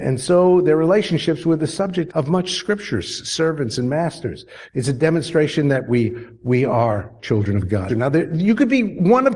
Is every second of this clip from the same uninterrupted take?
no; 3 cuts; at 2.1 s, 4.7 s, 7.9 s

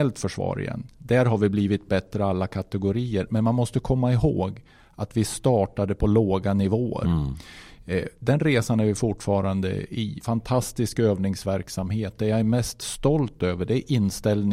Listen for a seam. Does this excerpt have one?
yes; 1 cut; at 10.2 s

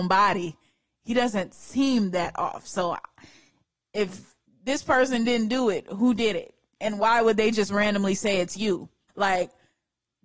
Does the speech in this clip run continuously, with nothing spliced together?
no; 1 cut; at 9.1 s

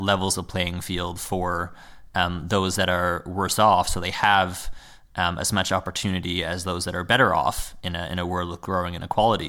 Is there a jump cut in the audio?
no; 0 cuts

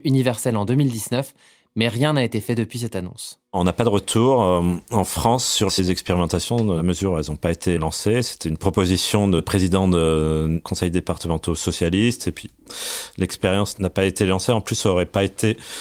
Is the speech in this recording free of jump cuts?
yes; 0 cuts

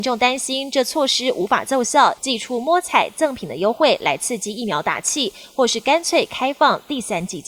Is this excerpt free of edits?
no; 1 cut; at 2.2 s

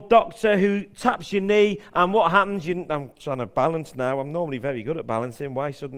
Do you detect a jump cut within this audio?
no; 0 cuts

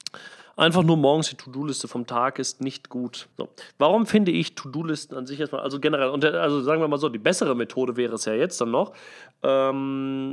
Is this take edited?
yes; 1 cut; at 3.3 s

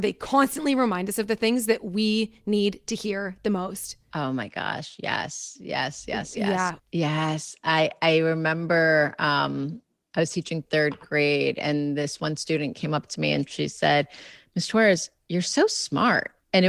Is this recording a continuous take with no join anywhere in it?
no; 1 cut; at 6.8 s

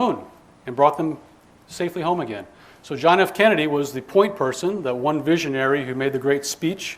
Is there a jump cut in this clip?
no; 0 cuts

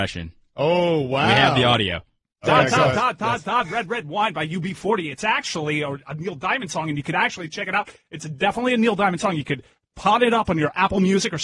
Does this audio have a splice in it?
no; 0 cuts

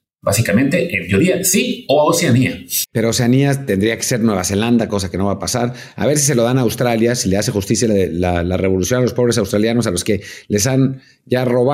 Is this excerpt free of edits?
yes; 0 cuts

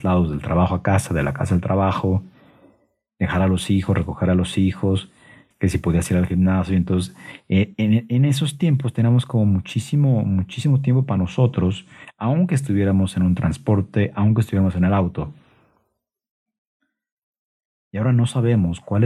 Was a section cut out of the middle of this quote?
yes; 1 cut; at 5.5 s

